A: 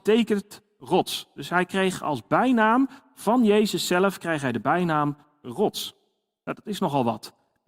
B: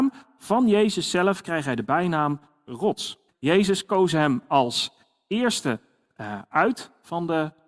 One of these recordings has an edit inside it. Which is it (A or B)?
B